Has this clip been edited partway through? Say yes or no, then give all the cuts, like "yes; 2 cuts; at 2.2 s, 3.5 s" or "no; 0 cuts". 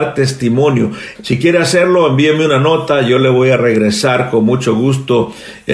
yes; 1 cut; at 1.1 s